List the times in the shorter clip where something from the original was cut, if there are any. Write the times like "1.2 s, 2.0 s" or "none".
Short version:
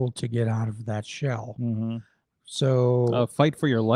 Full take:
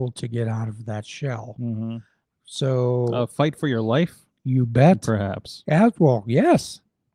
none